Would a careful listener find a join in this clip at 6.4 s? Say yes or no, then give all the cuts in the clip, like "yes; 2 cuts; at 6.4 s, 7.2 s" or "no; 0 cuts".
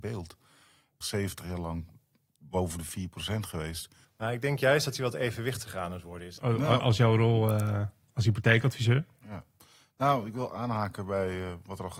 yes; 3 cuts; at 1.0 s, 4.0 s, 6.4 s